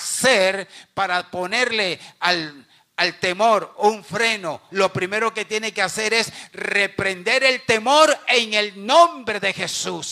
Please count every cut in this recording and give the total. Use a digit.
1